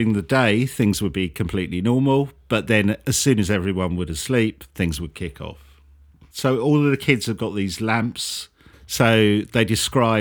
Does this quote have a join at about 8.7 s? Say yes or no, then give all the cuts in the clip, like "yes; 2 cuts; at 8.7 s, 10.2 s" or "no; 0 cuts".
yes; 2 cuts; at 6.3 s, 8.7 s